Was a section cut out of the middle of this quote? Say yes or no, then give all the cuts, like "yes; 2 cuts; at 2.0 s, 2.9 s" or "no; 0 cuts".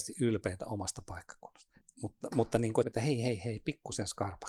yes; 2 cuts; at 1.8 s, 2.8 s